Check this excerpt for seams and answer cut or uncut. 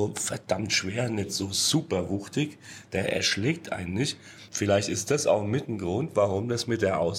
uncut